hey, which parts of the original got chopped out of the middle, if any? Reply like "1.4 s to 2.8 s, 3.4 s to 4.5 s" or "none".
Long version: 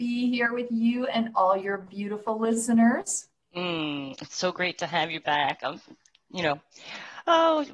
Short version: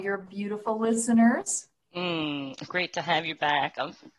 4.3 s to 4.5 s